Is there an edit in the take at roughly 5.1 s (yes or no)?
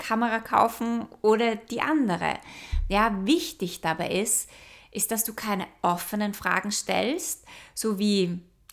no